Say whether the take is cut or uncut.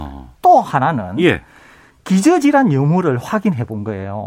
uncut